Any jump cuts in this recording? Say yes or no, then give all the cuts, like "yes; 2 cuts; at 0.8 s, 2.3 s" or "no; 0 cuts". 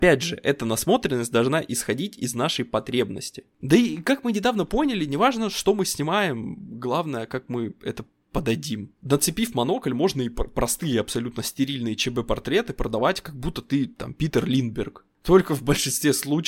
no; 0 cuts